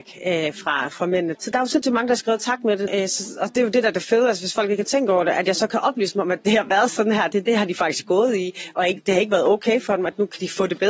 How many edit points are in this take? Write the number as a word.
two